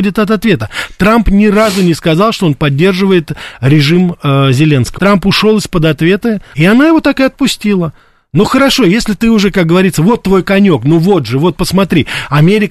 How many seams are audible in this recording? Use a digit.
2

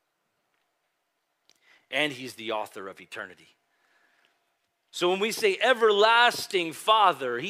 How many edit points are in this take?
0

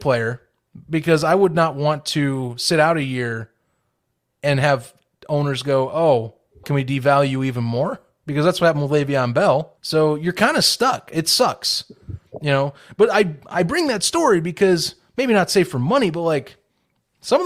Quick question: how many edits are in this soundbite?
2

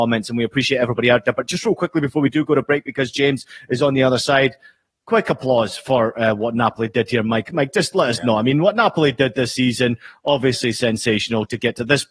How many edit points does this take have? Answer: 0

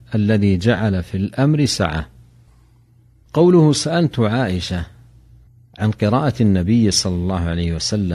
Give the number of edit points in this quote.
0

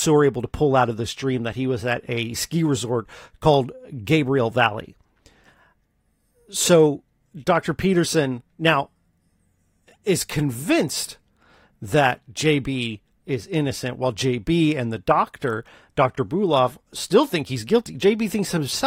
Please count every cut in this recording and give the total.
0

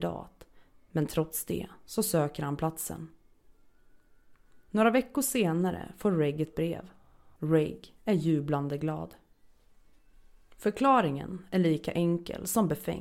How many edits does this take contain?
1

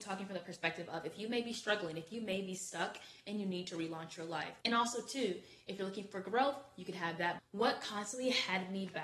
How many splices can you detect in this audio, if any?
2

